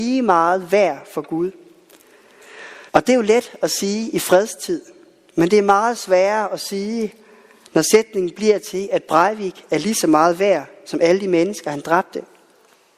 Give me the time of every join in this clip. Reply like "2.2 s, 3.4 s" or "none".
2.9 s